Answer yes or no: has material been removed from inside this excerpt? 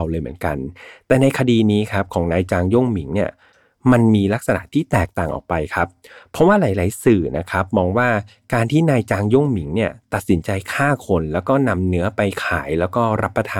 no